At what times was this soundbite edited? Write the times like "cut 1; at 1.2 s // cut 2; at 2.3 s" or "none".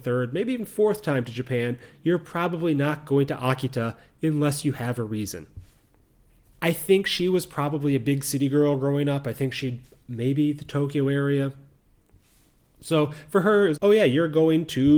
cut 1; at 6.5 s // cut 2; at 13.8 s